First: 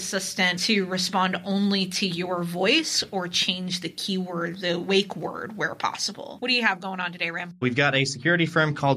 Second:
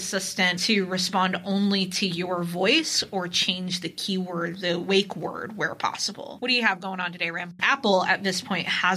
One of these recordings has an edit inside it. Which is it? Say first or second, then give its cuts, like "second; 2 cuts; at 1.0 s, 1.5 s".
second; 1 cut; at 7.6 s